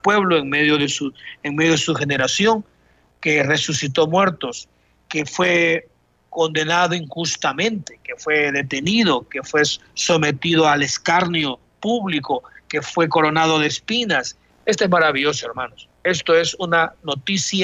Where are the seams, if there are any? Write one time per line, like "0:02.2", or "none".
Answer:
0:14.5
0:15.9